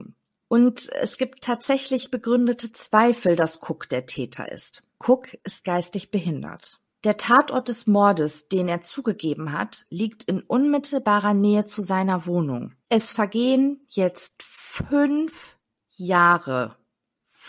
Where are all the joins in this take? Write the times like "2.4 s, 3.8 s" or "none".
12.8 s